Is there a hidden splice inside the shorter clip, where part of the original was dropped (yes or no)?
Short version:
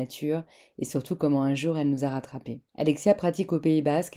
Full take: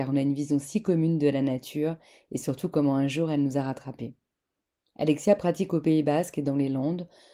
yes